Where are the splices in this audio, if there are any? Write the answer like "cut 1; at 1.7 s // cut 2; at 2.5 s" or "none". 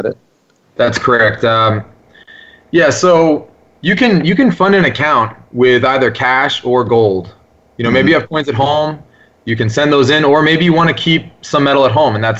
none